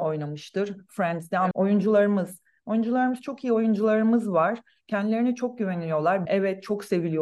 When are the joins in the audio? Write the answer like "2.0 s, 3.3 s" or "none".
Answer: 1.5 s, 6.3 s